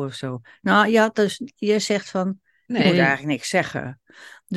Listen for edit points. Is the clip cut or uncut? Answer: uncut